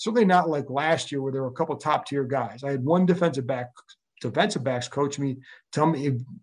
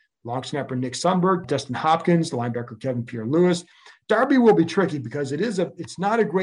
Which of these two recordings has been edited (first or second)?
second